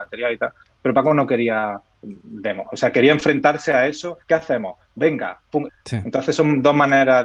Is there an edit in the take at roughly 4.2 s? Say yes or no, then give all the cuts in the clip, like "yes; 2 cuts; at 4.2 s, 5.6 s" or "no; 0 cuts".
yes; 2 cuts; at 4.2 s, 5.7 s